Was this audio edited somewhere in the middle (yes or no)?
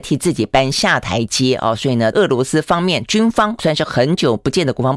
yes